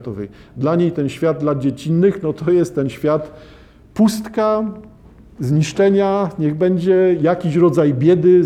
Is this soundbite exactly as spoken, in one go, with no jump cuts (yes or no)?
yes